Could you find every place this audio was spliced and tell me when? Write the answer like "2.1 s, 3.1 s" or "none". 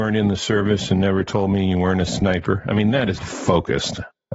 3.2 s